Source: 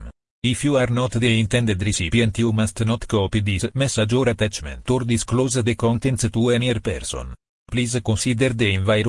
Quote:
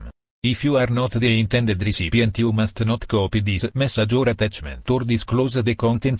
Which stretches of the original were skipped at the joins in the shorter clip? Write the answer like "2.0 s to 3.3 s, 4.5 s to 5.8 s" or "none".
none